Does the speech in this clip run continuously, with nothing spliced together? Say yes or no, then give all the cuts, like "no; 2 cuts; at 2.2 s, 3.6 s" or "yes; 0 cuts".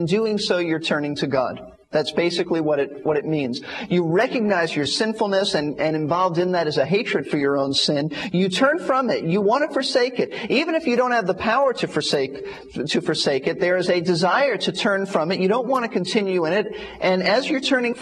yes; 0 cuts